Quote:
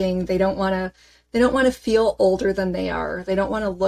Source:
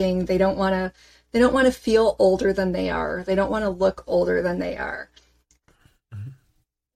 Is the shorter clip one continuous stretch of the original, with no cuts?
yes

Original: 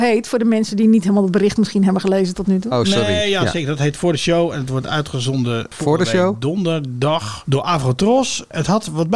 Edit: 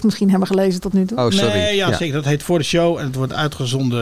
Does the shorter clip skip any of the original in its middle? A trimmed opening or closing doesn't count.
no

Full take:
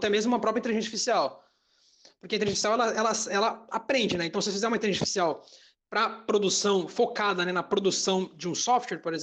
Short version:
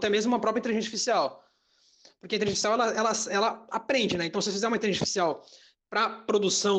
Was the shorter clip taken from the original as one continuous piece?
yes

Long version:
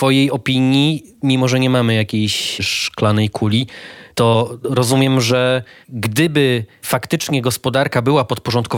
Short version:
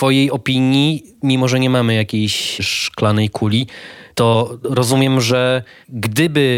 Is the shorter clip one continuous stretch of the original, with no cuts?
yes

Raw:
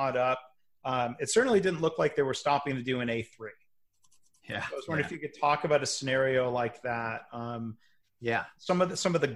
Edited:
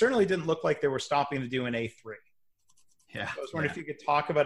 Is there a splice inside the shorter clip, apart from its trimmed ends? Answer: no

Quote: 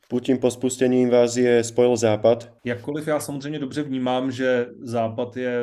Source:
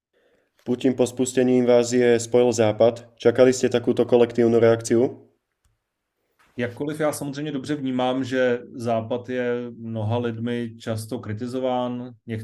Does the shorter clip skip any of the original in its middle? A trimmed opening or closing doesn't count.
yes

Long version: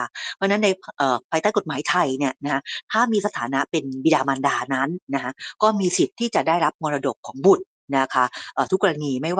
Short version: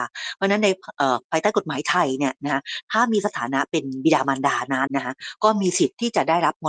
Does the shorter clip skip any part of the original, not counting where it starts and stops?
yes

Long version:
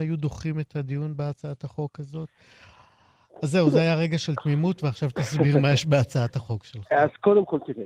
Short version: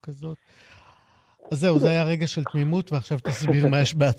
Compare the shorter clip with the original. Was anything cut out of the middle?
no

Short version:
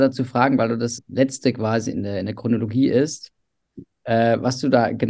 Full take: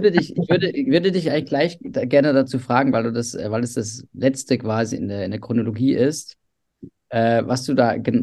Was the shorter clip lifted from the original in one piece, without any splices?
no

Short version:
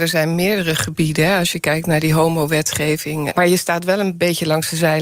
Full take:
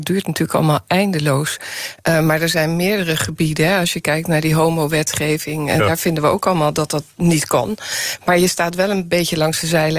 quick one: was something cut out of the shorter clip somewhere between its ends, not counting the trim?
yes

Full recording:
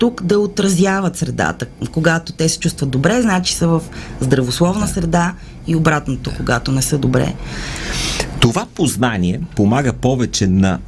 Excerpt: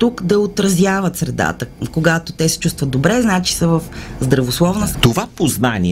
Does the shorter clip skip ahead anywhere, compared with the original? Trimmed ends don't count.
yes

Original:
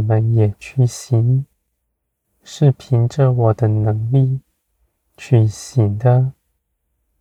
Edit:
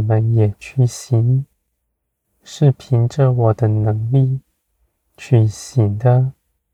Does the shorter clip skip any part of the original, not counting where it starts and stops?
no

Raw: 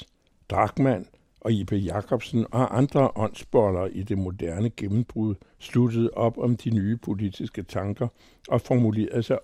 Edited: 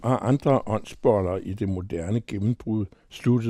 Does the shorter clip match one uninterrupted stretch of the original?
yes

